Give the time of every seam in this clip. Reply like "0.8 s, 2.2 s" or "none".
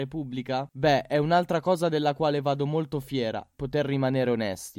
3.5 s

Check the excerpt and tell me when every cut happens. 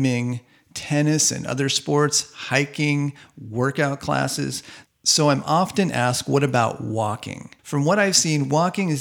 4.9 s, 7.6 s

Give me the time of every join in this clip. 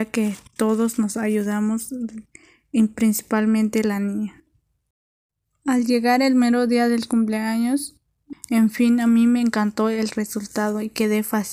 8.3 s

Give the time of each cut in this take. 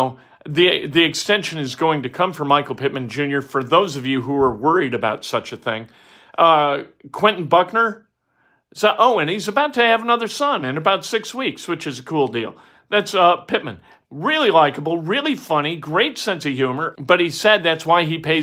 14.0 s, 16.9 s

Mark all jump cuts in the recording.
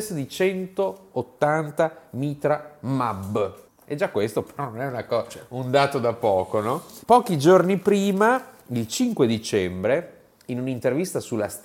3.7 s

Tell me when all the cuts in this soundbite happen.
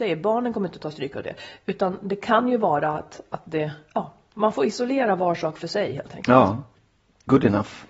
none

